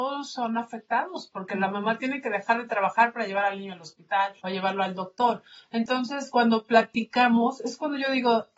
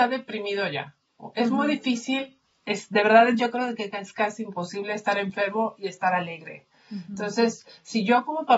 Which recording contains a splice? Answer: first; 1 cut; at 4.4 s

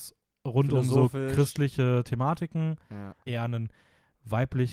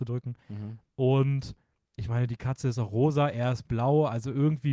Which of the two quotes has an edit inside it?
first; 1 cut; at 3.3 s

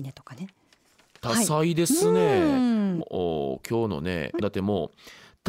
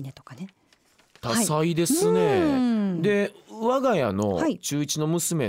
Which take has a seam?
first; 2 cuts; at 3.0 s, 4.4 s

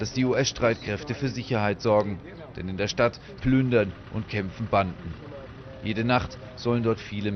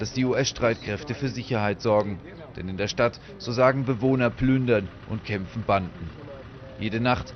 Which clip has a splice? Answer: first; 1 cut; at 3.4 s

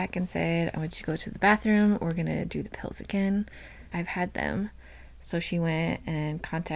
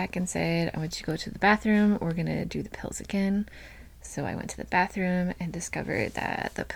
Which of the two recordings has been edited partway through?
first; 1 cut; at 3.9 s

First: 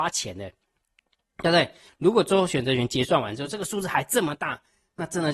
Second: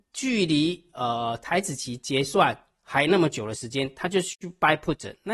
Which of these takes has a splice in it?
first; 1 cut; at 1.9 s

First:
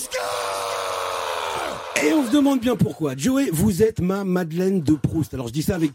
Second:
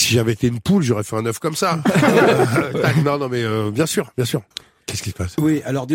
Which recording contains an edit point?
second; 1 cut; at 4.5 s

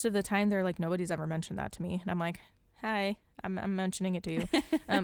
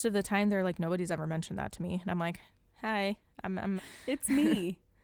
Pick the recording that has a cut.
second; 1 cut; at 3.8 s

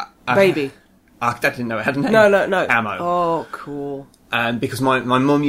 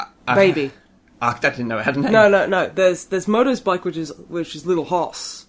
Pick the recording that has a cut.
first; 1 cut; at 2.7 s

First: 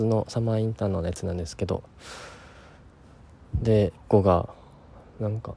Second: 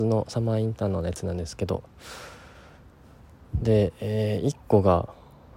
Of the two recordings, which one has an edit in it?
first; 1 cut; at 3.9 s

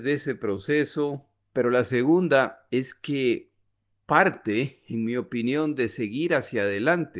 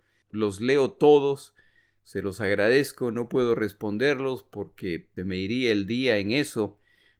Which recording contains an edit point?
first; 1 cut; at 1.4 s

